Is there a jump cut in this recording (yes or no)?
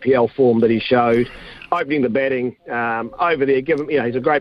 no